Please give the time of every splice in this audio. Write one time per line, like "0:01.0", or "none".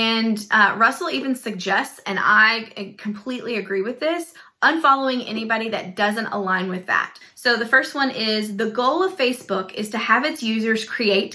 0:07.2

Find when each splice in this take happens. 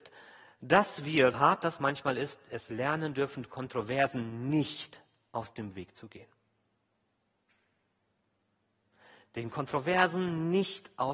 0:01.3

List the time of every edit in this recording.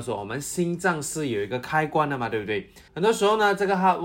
0:02.9

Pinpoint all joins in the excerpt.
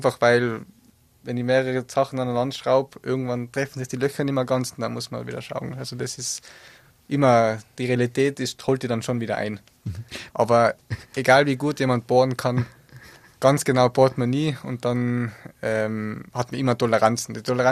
0:10.3

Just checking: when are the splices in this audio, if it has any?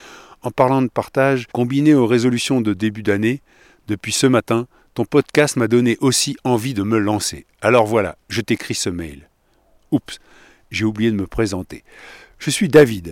0:01.5

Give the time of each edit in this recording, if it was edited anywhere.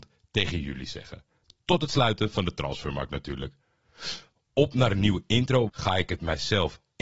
0:05.7

